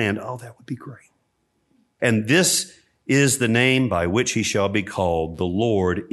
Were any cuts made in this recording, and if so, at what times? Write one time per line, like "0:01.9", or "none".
0:02.0

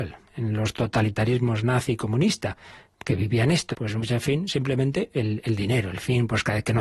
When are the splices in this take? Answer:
0:03.7

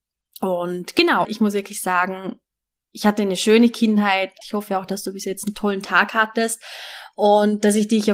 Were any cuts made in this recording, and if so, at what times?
0:01.2
0:04.4

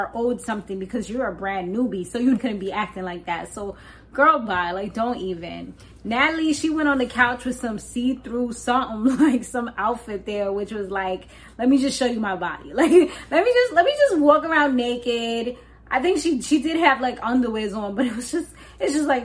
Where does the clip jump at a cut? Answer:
0:02.4

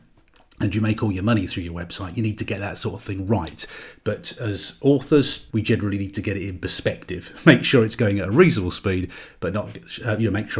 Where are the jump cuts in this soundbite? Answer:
0:05.5

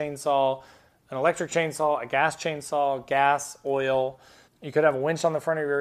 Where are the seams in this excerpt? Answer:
0:04.5

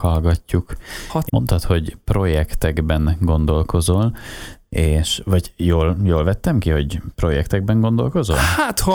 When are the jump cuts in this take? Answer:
0:01.3

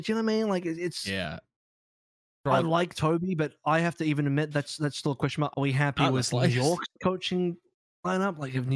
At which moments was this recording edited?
0:05.5

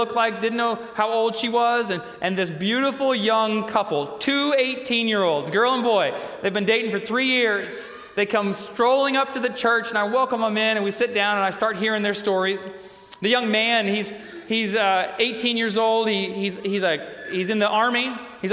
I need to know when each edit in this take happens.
none

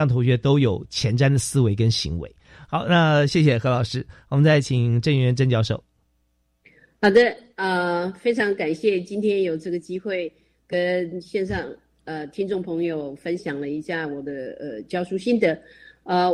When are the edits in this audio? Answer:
none

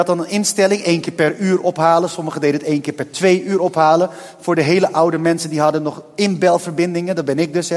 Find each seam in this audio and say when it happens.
none

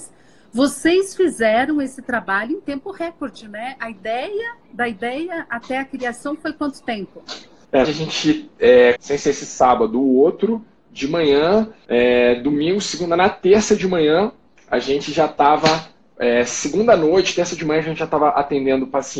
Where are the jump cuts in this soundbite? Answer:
0:07.8
0:09.0

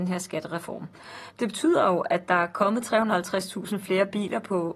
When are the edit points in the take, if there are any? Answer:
0:01.3

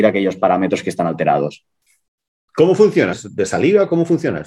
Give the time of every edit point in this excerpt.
0:03.1

